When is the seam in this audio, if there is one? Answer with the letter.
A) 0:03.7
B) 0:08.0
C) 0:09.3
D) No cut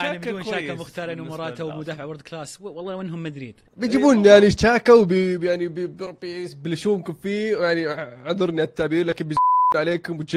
A